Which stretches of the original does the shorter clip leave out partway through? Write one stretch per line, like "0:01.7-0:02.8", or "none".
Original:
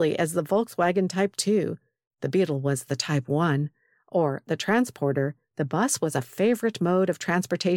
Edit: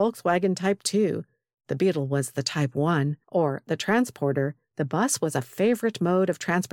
0:03.8-0:04.0